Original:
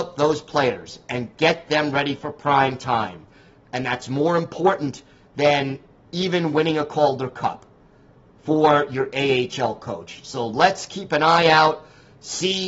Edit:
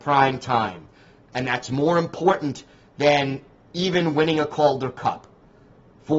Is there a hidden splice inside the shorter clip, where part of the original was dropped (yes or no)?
no